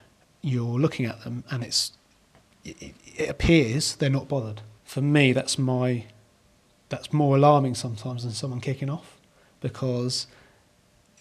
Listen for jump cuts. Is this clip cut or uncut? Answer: cut